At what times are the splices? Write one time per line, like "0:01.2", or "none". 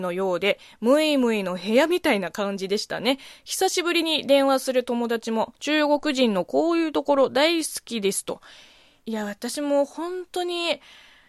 0:05.5